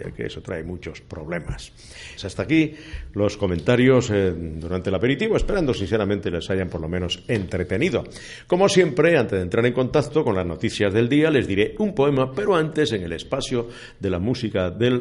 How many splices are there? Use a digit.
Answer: 1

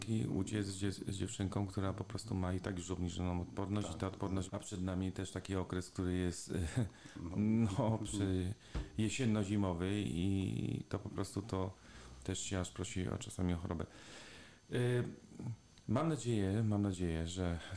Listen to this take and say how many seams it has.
1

